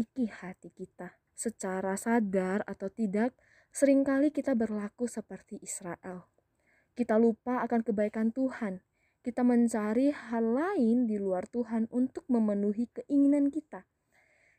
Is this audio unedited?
no; 1 cut; at 1.3 s

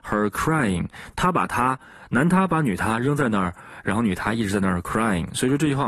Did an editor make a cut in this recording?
no; 0 cuts

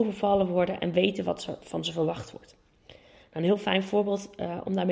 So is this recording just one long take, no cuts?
yes; 0 cuts

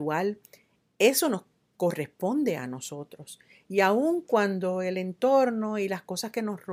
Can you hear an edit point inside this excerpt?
no; 0 cuts

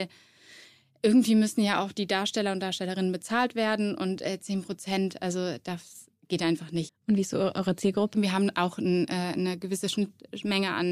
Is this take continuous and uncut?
no; 2 cuts; at 6.9 s, 8.1 s

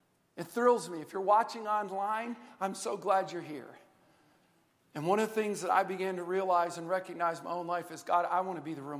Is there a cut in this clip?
yes; 1 cut; at 4.8 s

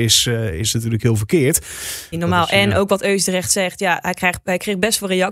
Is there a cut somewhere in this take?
yes; 1 cut; at 2.1 s

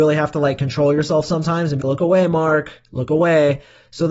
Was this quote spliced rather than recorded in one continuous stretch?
yes; 1 cut; at 1.8 s

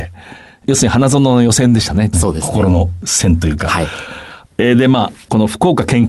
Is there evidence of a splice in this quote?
yes; 2 cuts; at 2.1 s, 4.5 s

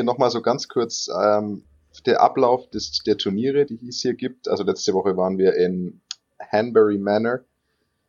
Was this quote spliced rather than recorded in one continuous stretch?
no; 0 cuts

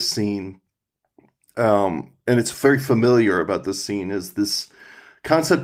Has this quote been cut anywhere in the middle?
no; 0 cuts

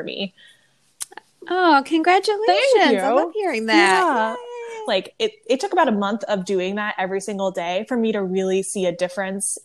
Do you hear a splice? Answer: yes; 1 cut; at 4.9 s

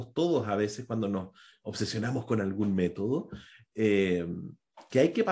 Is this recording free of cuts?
yes; 0 cuts

